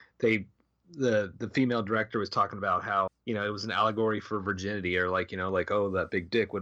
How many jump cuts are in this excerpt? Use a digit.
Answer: 1